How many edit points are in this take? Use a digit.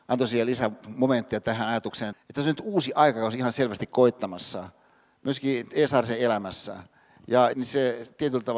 2